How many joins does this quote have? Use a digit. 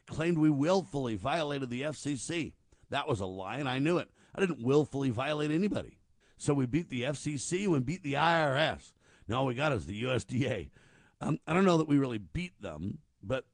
1